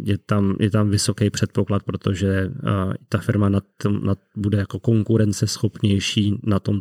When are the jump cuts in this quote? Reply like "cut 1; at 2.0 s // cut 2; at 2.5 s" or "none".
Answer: none